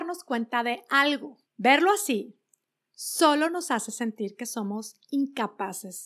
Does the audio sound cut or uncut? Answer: cut